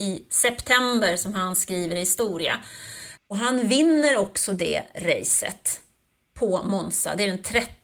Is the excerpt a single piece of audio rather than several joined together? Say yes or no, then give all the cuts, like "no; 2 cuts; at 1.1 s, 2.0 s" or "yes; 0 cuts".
no; 1 cut; at 3.2 s